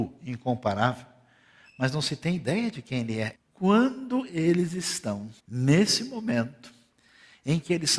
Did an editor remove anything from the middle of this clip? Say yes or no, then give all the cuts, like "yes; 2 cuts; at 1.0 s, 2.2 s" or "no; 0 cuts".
yes; 2 cuts; at 3.3 s, 5.4 s